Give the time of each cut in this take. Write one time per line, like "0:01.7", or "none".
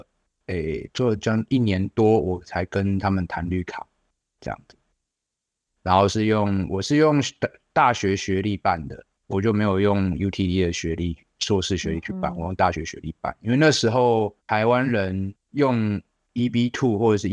0:09.1
0:14.4